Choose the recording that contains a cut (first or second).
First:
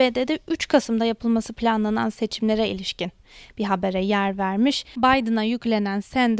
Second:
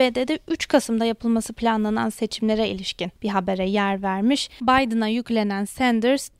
second